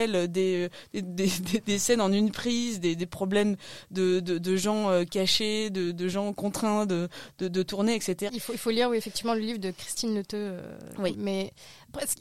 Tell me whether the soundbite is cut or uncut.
cut